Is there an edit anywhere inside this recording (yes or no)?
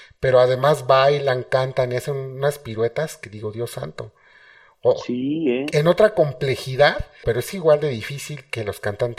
yes